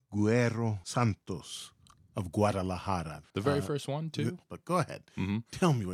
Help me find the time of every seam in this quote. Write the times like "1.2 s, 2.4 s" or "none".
3.2 s, 4.4 s